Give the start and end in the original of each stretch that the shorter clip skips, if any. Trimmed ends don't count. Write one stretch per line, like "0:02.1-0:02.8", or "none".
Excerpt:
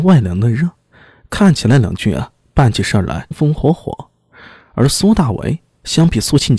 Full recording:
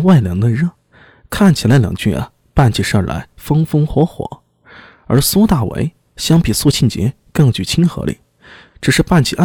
0:03.3-0:03.6